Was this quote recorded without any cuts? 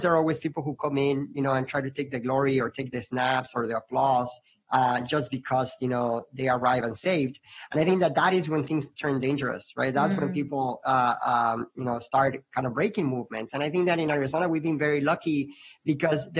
yes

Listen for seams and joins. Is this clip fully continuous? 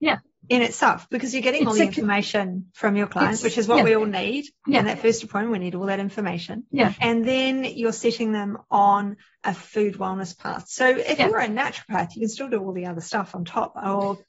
yes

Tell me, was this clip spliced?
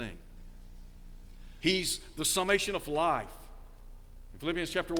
yes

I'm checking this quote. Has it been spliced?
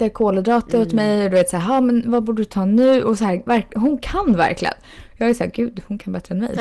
no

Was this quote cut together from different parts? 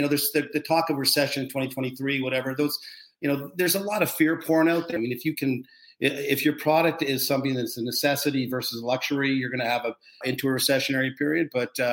yes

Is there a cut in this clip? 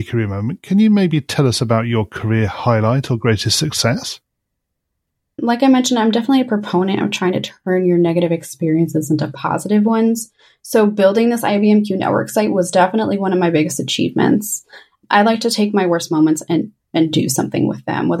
no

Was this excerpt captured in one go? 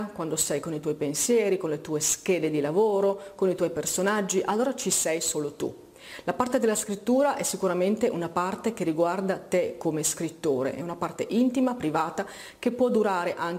yes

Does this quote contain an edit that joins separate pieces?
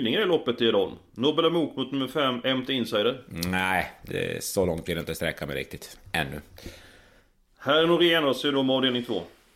no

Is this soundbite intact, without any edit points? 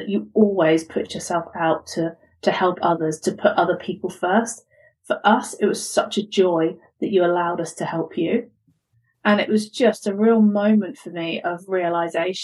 yes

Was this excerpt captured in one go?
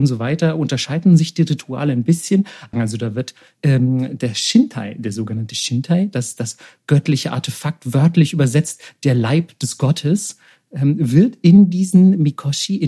no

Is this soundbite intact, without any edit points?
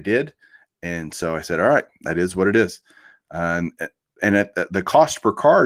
yes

